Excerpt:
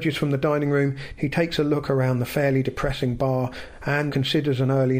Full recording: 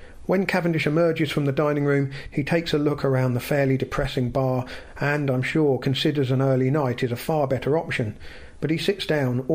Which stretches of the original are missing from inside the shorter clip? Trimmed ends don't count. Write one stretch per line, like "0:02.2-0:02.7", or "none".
0:05.2-0:05.8